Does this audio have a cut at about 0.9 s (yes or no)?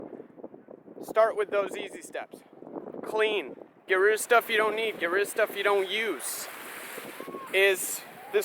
no